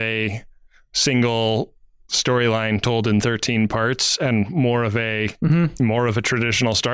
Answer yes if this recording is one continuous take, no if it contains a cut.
yes